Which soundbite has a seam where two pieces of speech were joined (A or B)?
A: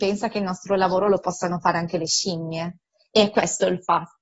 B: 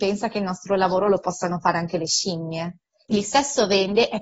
B